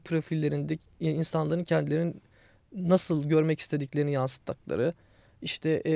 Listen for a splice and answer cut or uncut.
uncut